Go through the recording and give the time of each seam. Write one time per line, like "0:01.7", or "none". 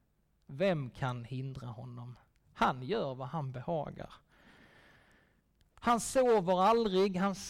0:05.7